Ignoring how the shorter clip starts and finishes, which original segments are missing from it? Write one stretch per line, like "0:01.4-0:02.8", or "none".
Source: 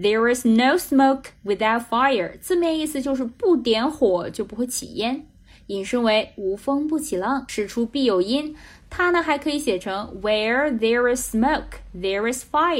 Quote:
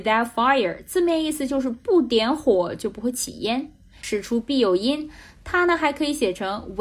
0:05.6-0:07.5